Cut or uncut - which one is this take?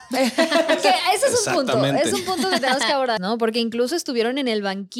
cut